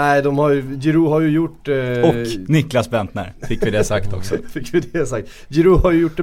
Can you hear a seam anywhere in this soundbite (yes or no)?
no